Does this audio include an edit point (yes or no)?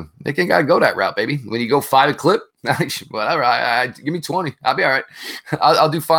no